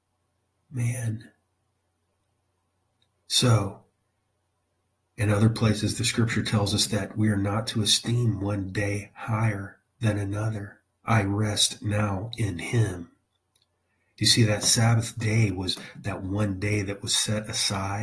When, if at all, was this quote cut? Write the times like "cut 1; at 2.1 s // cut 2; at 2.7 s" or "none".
cut 1; at 11.0 s